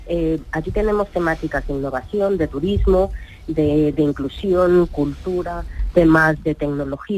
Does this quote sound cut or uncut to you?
uncut